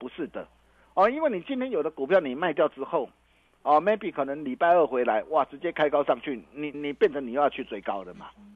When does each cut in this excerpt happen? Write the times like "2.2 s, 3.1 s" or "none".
6.7 s